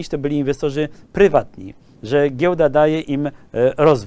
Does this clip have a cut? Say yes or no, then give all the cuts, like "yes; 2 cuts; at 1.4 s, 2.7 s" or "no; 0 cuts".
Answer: yes; 1 cut; at 2.0 s